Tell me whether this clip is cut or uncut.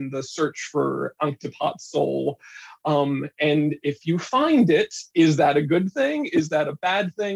uncut